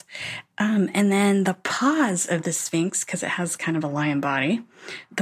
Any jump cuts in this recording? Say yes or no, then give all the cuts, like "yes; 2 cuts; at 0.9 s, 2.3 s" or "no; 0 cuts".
no; 0 cuts